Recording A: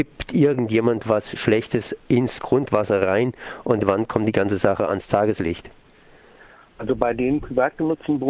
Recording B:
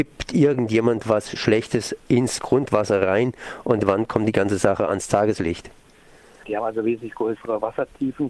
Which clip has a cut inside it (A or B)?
B